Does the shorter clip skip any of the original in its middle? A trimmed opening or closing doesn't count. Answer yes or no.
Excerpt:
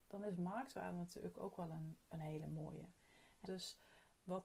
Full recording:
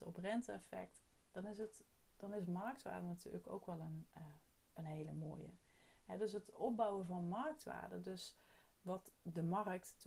yes